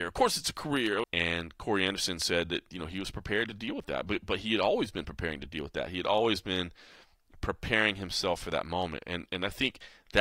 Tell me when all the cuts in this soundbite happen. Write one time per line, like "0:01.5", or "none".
0:01.0